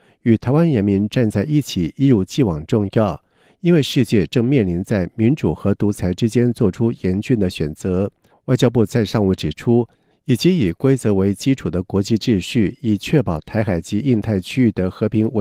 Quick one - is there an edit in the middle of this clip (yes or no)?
yes